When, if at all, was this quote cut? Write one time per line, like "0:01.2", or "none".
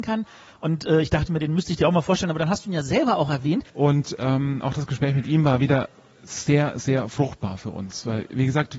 0:03.7